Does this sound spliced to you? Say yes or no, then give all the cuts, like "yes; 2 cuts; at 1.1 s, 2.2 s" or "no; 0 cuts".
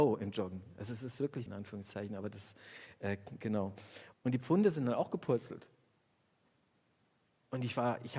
yes; 2 cuts; at 1.5 s, 4.1 s